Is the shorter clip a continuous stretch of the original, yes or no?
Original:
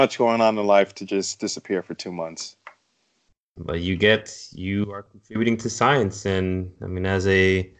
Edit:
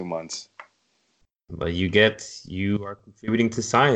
yes